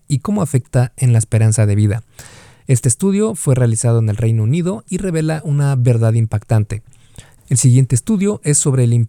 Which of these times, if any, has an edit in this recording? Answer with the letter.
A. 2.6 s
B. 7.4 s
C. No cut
B